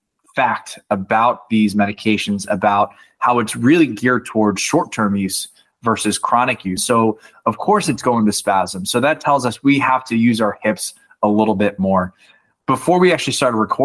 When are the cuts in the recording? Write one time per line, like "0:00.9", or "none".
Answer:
0:06.8